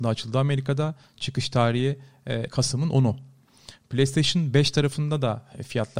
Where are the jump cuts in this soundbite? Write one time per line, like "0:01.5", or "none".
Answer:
0:02.5